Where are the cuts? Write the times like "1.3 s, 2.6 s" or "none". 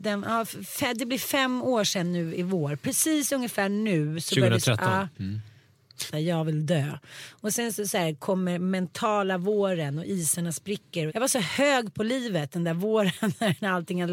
6.1 s, 11.1 s